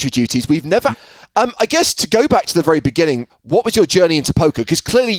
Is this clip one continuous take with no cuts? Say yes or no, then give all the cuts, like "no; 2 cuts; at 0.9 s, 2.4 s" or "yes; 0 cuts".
no; 2 cuts; at 0.9 s, 3.3 s